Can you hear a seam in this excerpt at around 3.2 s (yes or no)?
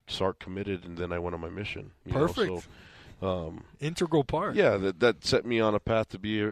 no